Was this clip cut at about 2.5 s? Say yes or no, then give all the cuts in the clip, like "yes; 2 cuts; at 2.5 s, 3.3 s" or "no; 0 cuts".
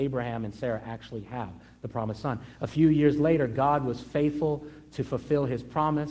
no; 0 cuts